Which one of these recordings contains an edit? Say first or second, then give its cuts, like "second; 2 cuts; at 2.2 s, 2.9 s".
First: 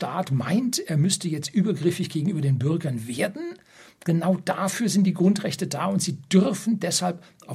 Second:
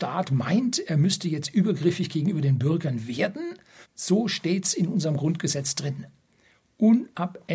second; 1 cut; at 3.8 s